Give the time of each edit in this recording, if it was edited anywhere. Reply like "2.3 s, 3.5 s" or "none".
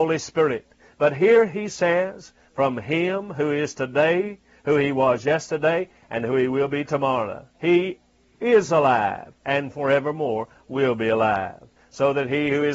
7.5 s, 9.4 s